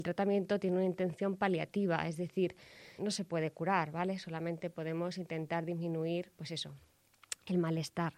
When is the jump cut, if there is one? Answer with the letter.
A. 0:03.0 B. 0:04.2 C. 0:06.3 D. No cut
A